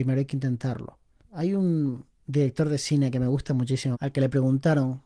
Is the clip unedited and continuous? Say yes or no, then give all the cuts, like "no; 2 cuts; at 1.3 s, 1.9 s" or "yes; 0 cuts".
no; 2 cuts; at 1.2 s, 3.9 s